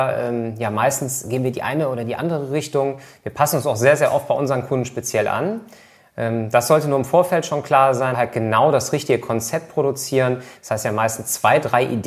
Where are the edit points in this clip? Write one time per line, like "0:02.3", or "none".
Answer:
0:08.1
0:10.6

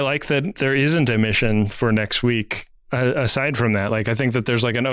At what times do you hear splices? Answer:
none

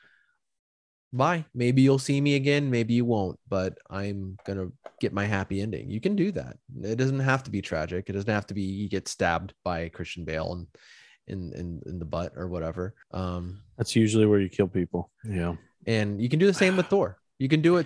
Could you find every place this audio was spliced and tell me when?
0:13.0
0:15.1

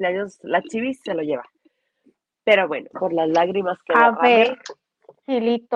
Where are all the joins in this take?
0:02.9

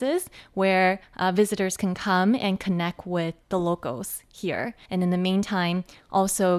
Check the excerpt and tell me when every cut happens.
0:04.9

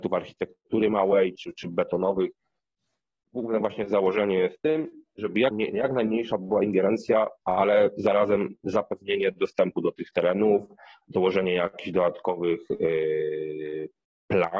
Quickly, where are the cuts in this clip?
0:01.4
0:05.5

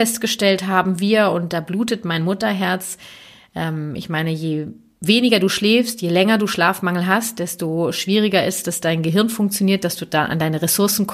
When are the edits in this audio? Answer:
none

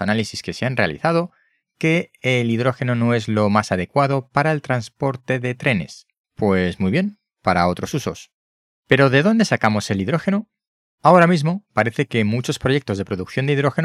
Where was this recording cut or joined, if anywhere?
0:06.2

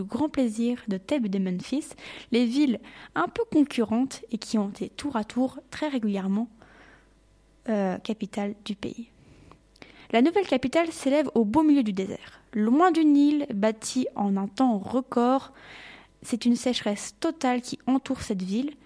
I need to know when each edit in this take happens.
none

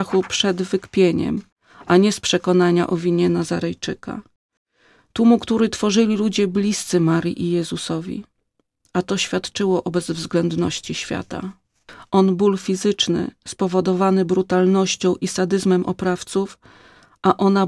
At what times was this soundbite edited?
0:12.1

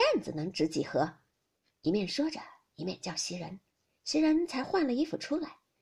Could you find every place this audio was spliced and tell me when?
none

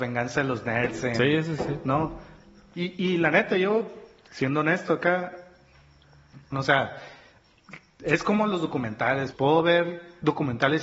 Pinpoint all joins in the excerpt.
0:02.7
0:06.5
0:09.3

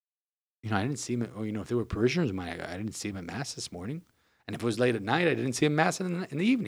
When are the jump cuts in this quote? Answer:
none

